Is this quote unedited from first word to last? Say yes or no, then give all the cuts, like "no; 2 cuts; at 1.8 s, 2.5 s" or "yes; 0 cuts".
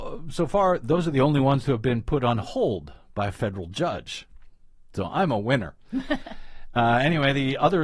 yes; 0 cuts